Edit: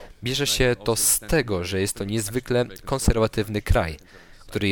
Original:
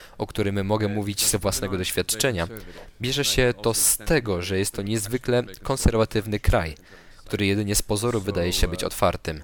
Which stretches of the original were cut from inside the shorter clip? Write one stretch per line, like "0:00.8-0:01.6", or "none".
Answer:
none